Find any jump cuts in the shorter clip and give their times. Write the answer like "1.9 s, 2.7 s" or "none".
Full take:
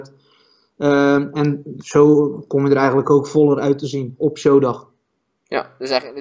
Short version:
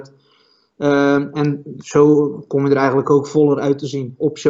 none